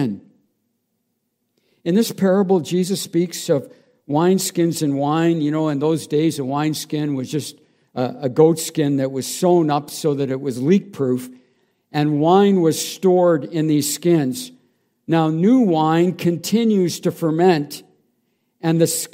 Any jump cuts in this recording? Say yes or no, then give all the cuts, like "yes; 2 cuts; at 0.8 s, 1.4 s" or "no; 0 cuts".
no; 0 cuts